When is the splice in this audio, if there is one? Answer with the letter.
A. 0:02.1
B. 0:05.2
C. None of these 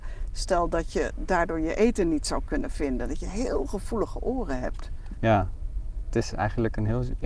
B